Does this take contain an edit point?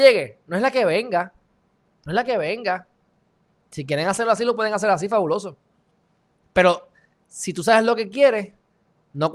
no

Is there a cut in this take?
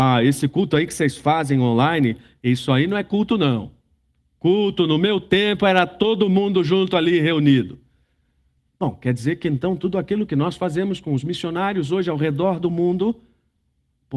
no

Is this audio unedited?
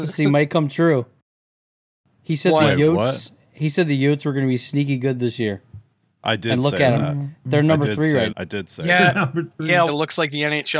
no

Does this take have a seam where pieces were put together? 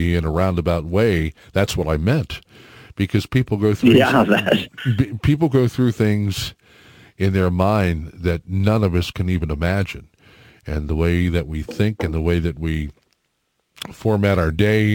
no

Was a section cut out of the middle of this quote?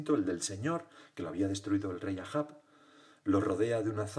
no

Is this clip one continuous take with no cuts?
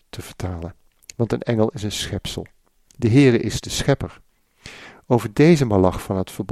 yes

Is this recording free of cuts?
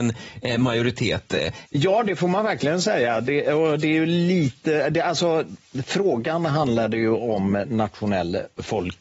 no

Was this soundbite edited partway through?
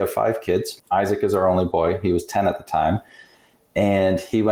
no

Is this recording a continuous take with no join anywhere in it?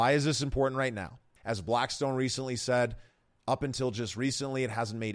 no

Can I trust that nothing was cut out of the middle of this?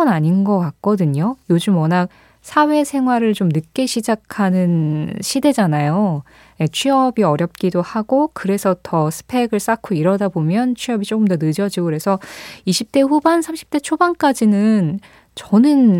yes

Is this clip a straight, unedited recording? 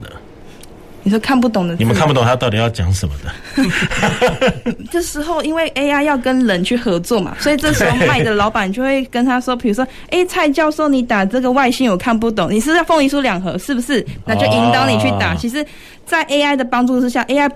no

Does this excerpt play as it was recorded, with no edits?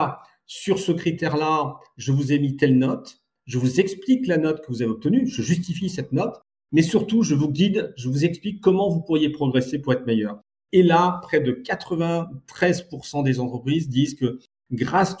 yes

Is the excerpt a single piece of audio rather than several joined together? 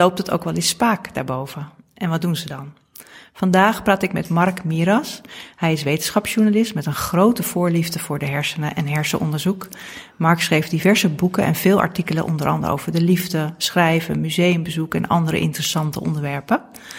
yes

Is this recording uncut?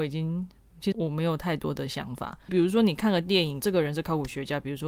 no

